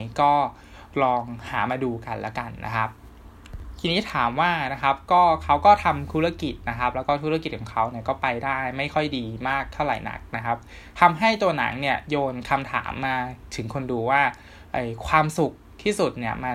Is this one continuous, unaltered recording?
yes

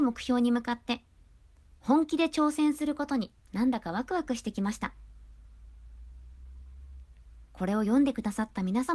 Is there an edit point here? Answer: yes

